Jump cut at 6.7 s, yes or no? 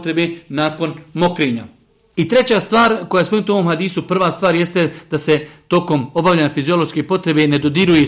no